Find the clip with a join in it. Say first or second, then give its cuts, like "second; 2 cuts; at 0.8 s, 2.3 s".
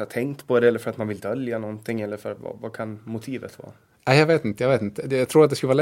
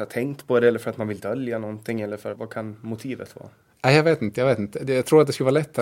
second; 1 cut; at 2.4 s